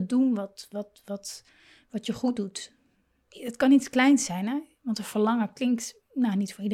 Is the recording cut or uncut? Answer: uncut